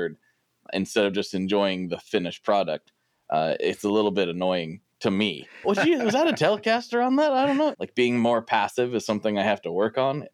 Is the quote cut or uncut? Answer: cut